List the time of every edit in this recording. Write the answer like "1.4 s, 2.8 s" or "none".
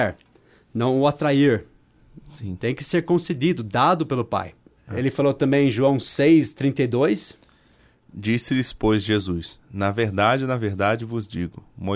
none